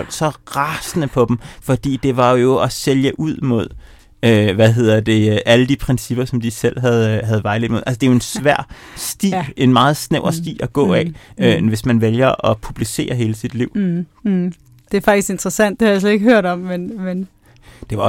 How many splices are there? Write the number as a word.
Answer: zero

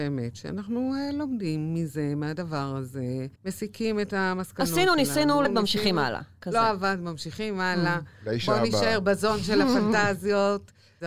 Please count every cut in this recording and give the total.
two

